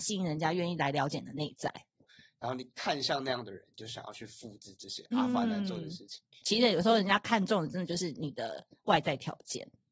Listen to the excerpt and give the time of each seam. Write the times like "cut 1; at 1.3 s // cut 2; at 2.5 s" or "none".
cut 1; at 2.0 s // cut 2; at 6.4 s